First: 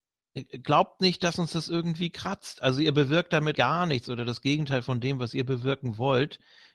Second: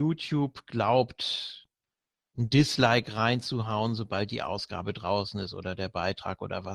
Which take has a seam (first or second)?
first